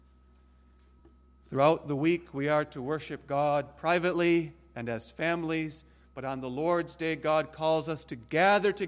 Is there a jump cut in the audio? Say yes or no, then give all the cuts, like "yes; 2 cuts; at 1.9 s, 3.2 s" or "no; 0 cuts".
no; 0 cuts